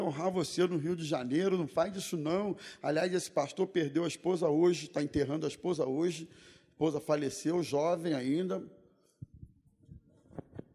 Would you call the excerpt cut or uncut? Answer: uncut